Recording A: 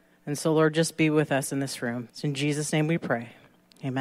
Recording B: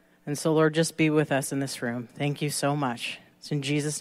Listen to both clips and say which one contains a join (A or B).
A